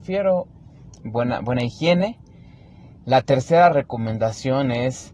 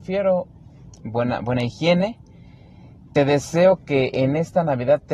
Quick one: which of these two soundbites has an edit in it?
first; 1 cut; at 3.0 s

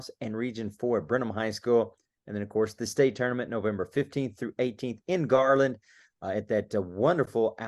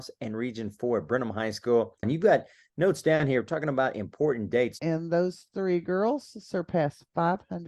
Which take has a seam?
second; 2 cuts; at 2.0 s, 4.8 s

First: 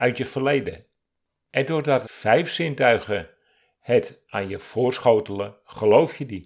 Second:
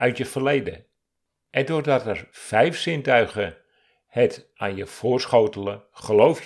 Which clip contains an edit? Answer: first; 1 cut; at 2.0 s

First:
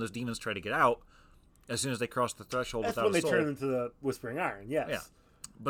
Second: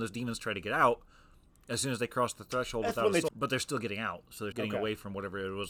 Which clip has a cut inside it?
second; 2 cuts; at 3.3 s, 4.5 s

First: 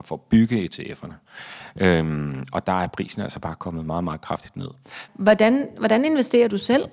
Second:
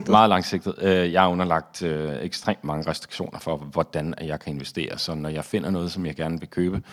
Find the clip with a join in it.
first; 1 cut; at 5.1 s

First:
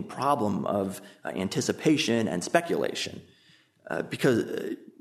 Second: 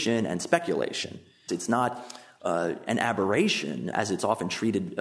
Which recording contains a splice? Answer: second; 2 cuts; at 1.5 s, 3.9 s

